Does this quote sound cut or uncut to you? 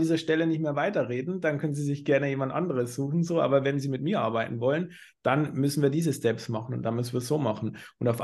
uncut